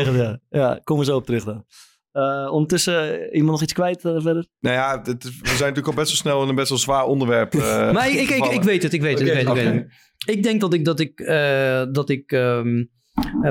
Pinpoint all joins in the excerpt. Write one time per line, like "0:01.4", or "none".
none